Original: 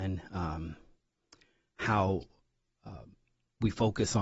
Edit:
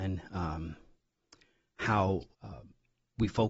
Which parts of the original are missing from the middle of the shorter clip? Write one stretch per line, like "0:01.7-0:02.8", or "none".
0:02.3-0:02.8